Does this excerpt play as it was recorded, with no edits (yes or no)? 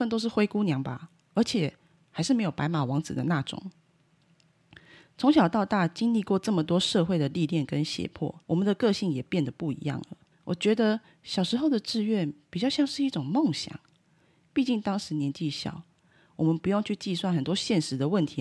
no